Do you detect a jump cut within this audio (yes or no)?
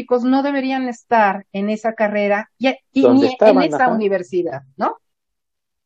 no